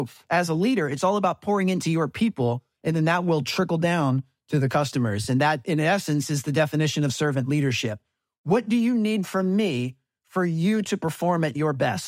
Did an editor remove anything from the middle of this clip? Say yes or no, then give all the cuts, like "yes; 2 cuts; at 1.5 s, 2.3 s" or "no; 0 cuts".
no; 0 cuts